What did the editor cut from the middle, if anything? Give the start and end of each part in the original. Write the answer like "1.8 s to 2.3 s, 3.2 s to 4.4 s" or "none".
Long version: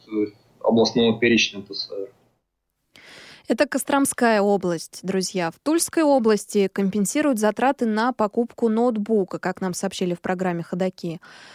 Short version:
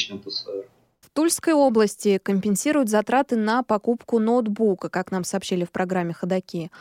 2.5 s to 5.5 s